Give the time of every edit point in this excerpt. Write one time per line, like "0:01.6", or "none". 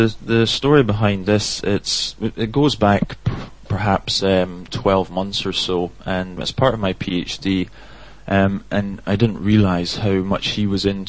0:06.4
0:08.2